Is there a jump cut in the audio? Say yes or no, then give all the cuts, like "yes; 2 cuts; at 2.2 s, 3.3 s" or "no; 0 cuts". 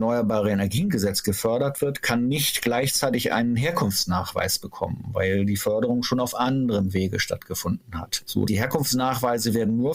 yes; 1 cut; at 8.5 s